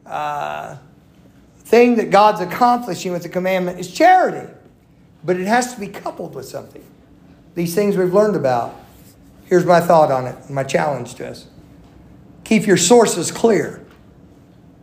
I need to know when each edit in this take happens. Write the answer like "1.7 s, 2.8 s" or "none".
none